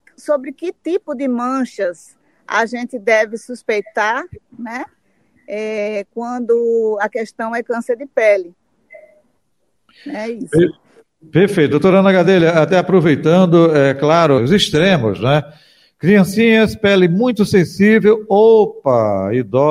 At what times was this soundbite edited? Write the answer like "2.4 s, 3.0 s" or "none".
14.4 s